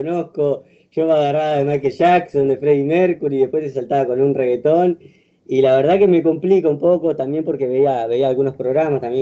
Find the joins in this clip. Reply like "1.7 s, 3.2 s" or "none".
none